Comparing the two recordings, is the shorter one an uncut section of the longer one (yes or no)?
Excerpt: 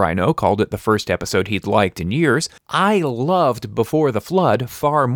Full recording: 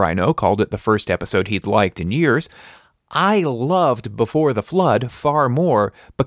no